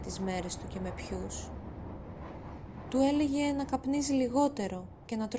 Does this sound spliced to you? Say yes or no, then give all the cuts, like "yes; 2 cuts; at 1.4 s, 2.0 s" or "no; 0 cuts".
no; 0 cuts